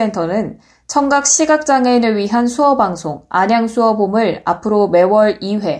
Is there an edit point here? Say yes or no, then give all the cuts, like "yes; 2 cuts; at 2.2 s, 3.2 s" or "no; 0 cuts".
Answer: no; 0 cuts